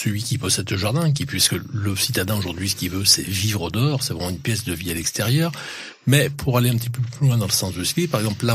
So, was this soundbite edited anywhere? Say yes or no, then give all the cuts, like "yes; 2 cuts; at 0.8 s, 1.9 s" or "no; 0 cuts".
no; 0 cuts